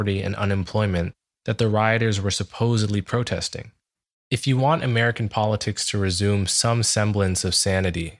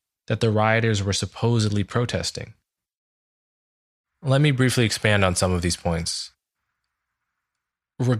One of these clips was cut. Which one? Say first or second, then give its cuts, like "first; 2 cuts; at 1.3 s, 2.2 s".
first; 1 cut; at 4.1 s